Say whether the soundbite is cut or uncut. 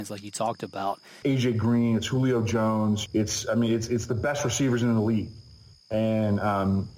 cut